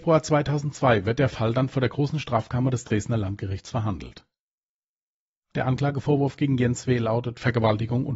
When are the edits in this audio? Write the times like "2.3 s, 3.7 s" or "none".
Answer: none